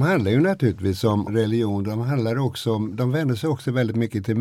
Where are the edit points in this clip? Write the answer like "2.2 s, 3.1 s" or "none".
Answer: 1.3 s

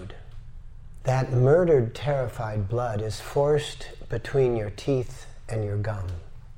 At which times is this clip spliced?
1.0 s

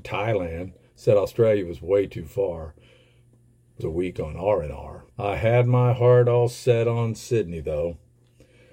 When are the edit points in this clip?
3.8 s, 5.1 s

